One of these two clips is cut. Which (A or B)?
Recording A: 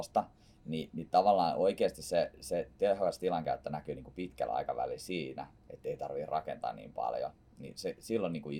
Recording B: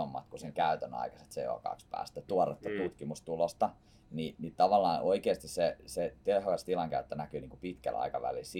B